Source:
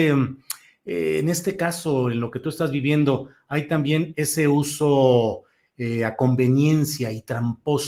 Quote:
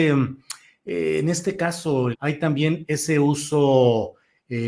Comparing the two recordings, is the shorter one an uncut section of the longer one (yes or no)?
no